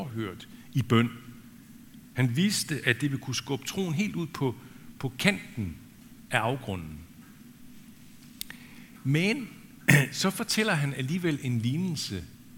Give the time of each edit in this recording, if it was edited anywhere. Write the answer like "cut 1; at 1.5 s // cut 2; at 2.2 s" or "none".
none